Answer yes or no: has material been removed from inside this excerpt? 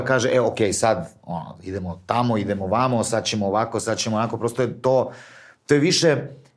no